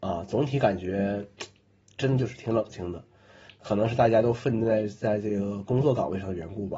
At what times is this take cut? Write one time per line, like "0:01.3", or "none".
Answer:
0:03.5